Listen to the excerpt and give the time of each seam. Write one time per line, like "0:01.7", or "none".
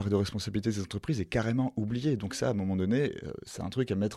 none